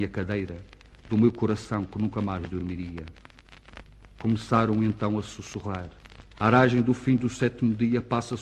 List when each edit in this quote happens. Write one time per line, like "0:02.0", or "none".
0:06.3

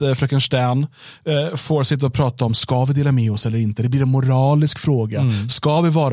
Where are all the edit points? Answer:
none

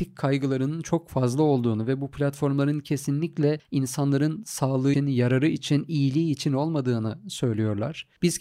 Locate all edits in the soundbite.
0:04.9

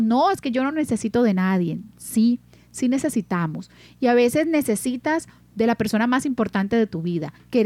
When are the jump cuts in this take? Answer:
none

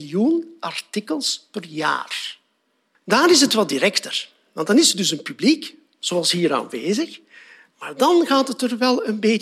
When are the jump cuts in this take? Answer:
0:02.9

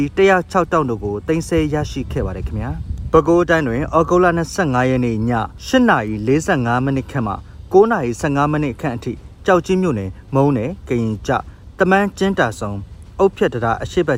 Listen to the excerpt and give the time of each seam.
none

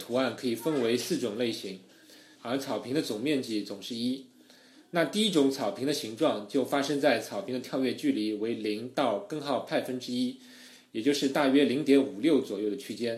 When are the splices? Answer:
0:02.4

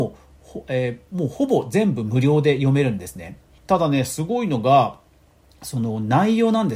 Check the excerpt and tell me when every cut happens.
0:03.6

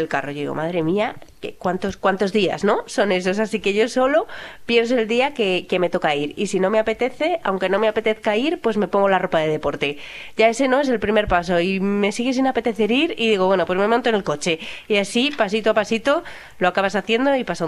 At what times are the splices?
none

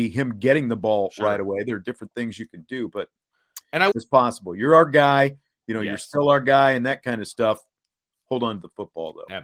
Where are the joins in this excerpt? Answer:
0:03.9

